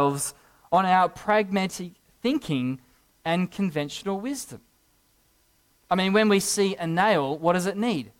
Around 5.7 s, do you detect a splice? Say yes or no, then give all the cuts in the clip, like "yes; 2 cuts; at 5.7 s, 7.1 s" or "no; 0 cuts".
no; 0 cuts